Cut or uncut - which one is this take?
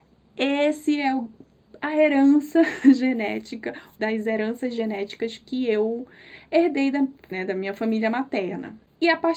cut